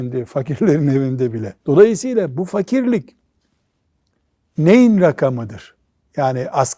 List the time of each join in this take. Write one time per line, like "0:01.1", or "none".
0:01.6